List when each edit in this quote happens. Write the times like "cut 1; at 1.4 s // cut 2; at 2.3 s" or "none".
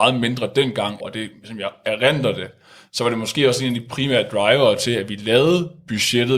cut 1; at 1.0 s